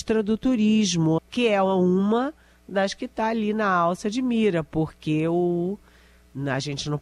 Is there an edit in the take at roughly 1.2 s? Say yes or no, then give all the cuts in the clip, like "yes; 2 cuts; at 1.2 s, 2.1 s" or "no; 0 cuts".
yes; 1 cut; at 1.2 s